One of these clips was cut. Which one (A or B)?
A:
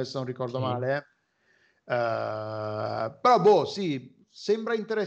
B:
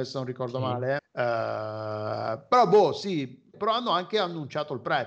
B